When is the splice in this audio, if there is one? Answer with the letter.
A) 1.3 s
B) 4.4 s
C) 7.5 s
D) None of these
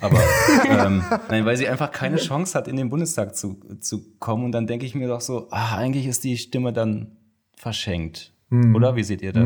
A